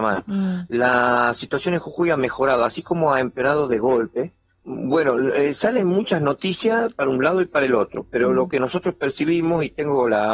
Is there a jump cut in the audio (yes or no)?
yes